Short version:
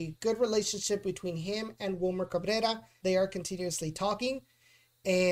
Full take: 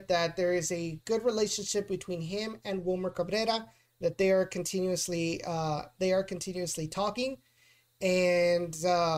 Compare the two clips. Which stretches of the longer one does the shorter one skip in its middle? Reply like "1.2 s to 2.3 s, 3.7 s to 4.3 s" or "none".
3.8 s to 6.0 s